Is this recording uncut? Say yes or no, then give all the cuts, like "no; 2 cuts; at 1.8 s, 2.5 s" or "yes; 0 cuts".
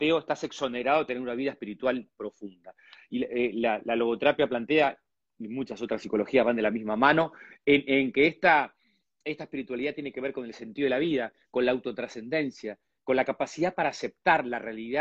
yes; 0 cuts